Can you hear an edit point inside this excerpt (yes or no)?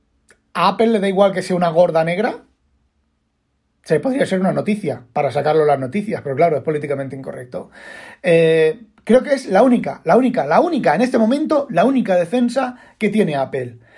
no